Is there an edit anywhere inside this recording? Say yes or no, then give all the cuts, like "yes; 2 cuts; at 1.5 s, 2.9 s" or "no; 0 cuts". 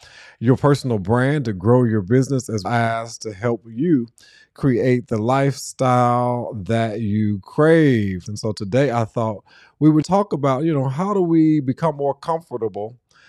yes; 3 cuts; at 2.6 s, 8.3 s, 10.0 s